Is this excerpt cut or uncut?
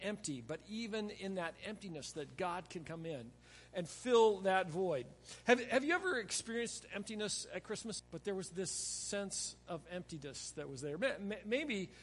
cut